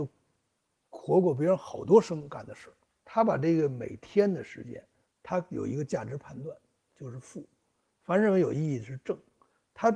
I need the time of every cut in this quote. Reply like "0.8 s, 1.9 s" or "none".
3.0 s, 6.9 s